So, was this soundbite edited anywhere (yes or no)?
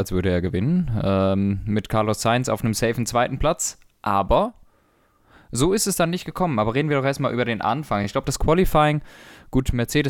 no